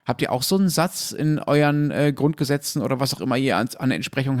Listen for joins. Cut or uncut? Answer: uncut